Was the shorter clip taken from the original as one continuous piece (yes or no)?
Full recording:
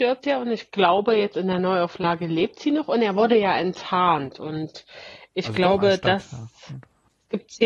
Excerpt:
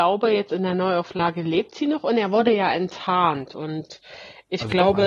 yes